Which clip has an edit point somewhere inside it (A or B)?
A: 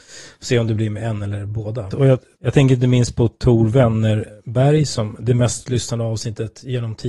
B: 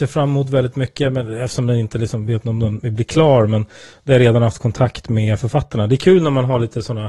A